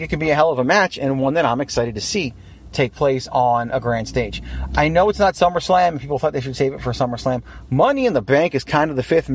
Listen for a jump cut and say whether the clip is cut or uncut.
uncut